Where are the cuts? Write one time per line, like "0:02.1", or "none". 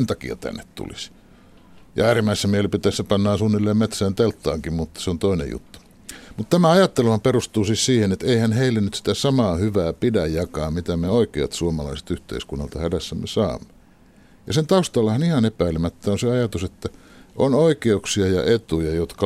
none